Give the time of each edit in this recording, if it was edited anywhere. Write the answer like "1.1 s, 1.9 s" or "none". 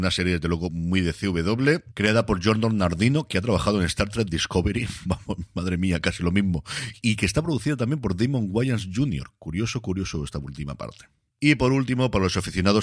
none